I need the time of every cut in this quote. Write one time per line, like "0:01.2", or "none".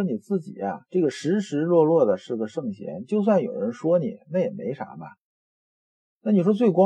none